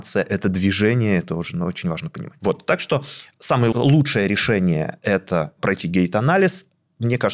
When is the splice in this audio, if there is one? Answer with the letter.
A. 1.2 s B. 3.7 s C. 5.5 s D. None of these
B